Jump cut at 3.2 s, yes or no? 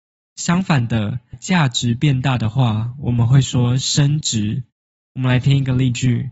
no